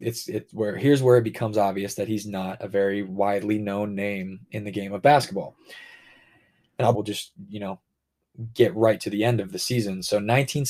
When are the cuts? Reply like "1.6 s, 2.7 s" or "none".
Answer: 6.9 s